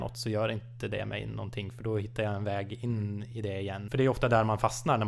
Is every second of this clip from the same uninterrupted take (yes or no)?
no